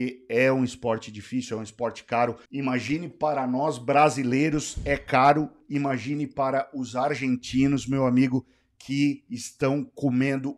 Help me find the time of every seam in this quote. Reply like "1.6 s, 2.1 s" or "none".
2.5 s